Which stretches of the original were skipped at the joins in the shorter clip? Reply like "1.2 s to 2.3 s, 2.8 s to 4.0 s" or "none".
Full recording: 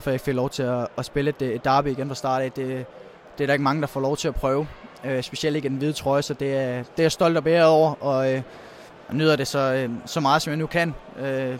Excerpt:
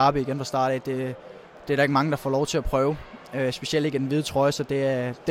none